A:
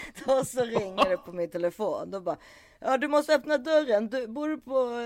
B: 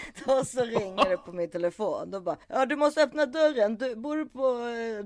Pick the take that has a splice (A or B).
B